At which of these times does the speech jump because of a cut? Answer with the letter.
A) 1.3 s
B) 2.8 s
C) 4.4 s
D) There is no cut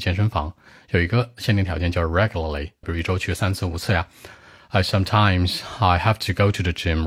B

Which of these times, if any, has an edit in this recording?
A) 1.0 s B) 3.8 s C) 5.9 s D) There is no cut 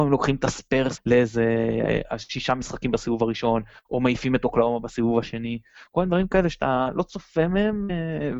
A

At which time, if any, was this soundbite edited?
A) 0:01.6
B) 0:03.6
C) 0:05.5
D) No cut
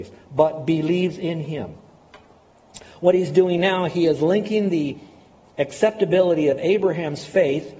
D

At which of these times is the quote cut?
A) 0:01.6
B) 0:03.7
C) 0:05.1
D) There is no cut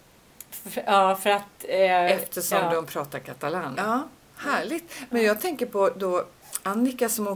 B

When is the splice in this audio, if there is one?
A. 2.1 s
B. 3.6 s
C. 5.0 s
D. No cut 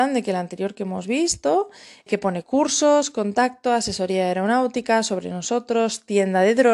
A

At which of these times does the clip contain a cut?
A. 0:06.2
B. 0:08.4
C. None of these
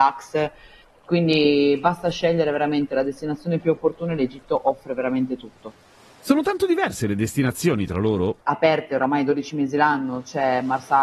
B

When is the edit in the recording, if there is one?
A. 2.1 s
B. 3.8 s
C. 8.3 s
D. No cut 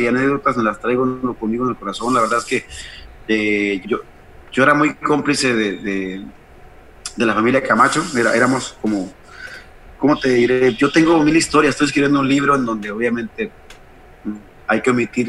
B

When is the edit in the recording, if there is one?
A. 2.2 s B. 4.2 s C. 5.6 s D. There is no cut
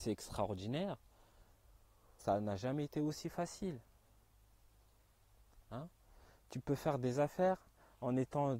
A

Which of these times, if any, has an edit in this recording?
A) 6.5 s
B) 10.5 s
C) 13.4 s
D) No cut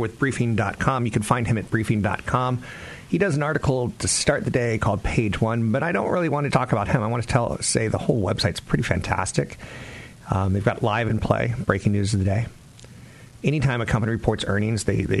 A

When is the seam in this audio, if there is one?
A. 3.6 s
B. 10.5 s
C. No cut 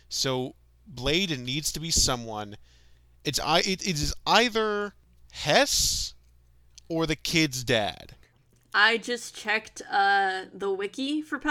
C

